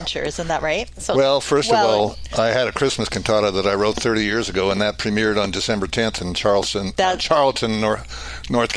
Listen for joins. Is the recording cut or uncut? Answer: uncut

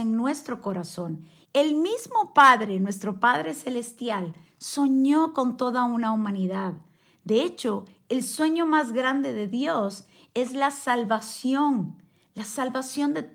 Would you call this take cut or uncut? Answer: cut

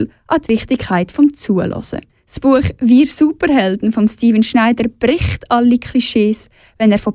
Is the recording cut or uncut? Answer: cut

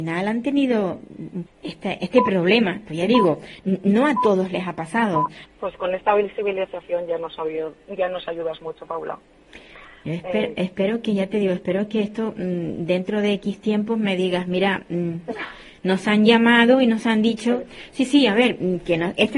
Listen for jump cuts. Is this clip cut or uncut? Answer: cut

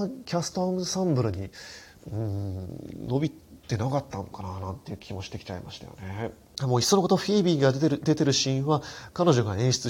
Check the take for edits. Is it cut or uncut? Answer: cut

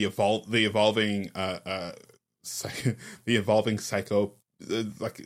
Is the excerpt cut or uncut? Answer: uncut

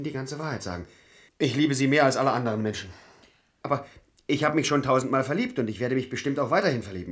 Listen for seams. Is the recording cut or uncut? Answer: cut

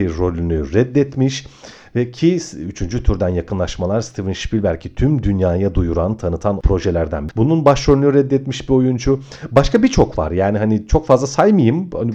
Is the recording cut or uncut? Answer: cut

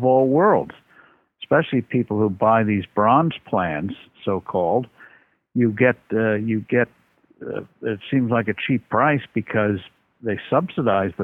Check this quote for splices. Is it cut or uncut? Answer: uncut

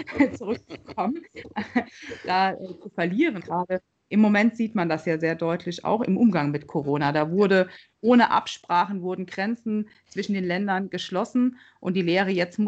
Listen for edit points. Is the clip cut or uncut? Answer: cut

